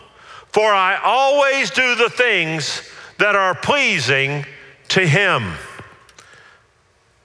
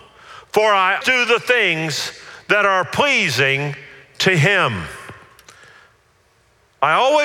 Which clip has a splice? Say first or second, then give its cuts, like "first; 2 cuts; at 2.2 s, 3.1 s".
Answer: second; 1 cut; at 1.0 s